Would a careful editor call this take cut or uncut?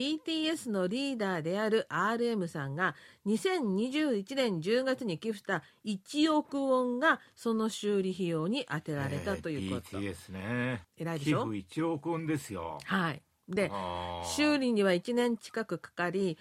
uncut